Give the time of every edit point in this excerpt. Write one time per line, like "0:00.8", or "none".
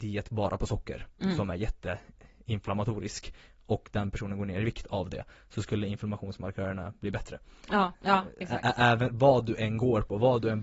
0:07.9